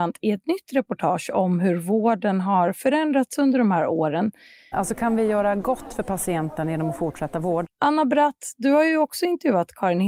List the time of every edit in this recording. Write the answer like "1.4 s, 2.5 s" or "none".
4.7 s, 7.6 s